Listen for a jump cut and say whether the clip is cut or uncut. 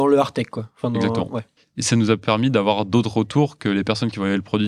cut